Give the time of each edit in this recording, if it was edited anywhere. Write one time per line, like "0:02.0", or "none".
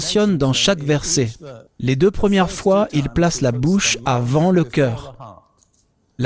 0:01.7